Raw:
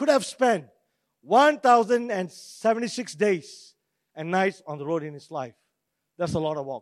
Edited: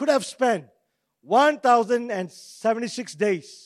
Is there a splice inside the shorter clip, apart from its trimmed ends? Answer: no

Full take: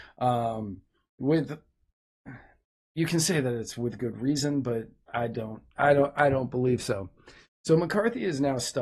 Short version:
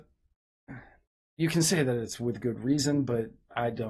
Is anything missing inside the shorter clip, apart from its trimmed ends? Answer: no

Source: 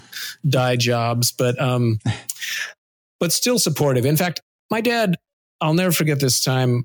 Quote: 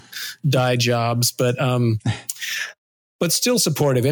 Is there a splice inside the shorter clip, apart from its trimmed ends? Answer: no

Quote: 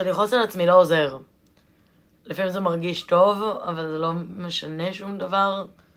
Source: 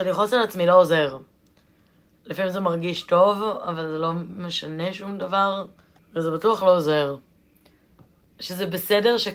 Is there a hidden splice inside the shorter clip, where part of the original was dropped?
no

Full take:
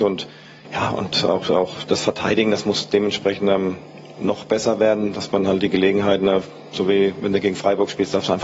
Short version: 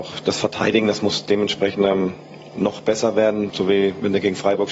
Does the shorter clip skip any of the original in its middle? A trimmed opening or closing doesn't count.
yes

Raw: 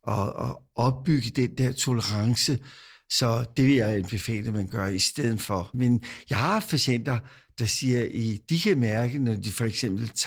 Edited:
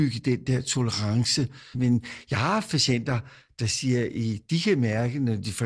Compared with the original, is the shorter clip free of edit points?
no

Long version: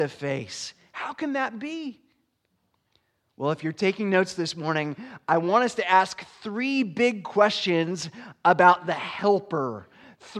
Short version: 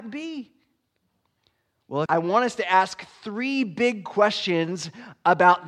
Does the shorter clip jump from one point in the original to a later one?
yes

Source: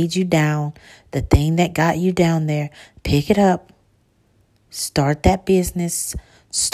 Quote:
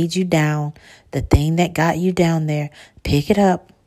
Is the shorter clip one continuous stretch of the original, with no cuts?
yes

